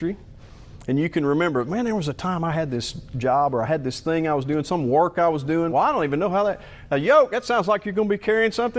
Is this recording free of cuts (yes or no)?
no